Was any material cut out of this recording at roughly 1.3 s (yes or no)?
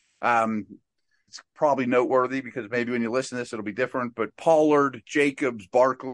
yes